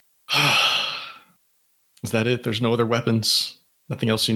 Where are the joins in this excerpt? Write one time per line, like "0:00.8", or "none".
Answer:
none